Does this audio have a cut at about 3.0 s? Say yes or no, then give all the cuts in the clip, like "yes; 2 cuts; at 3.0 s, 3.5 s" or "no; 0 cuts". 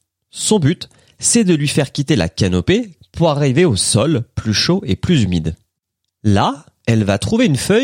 yes; 1 cut; at 3.0 s